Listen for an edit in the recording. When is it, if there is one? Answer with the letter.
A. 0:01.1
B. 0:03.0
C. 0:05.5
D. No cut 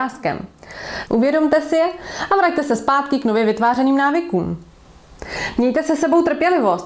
A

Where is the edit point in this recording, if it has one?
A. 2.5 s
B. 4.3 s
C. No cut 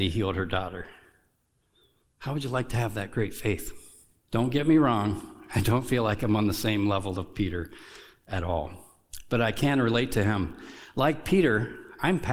B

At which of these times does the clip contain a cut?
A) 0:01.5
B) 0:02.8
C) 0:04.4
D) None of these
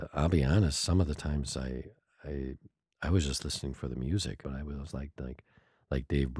C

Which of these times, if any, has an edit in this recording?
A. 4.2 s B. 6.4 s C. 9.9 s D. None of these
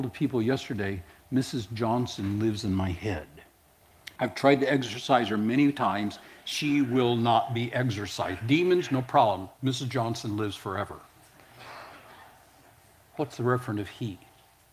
A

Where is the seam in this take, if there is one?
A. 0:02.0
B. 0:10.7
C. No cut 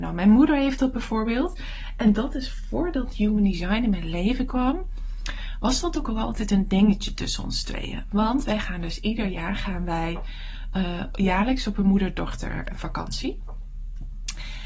C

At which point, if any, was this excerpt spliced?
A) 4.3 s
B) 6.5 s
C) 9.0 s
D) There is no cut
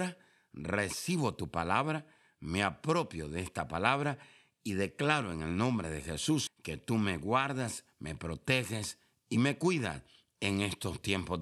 B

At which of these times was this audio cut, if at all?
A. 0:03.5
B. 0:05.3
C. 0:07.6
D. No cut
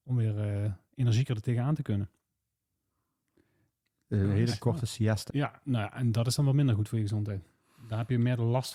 B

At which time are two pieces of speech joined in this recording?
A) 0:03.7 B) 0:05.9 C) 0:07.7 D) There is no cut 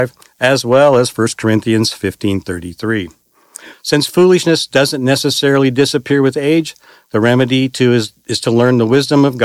A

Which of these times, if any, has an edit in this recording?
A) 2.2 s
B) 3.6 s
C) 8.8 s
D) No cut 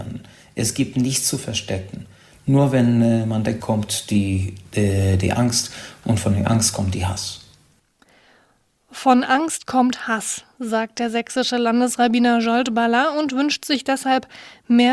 B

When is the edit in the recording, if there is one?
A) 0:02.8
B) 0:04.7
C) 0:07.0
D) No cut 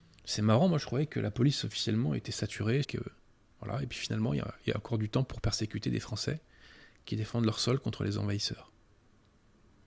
A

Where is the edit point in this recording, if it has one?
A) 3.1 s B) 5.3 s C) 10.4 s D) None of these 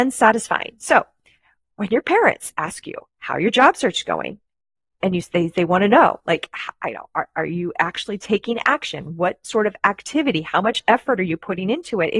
A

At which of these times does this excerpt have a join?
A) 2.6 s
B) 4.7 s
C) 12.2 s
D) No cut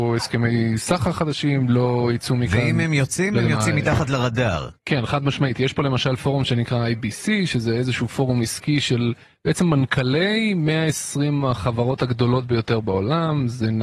B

